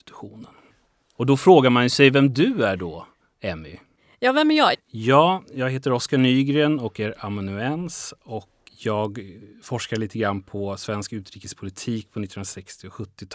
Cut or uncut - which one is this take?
cut